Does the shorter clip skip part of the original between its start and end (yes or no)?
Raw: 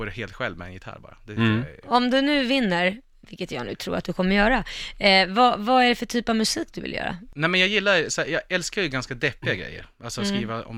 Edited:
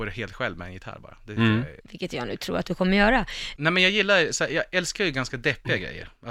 yes